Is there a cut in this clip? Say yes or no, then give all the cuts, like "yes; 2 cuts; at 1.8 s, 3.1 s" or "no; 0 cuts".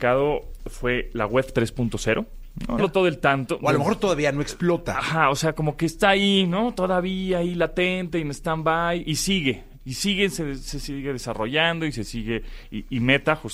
yes; 1 cut; at 2.8 s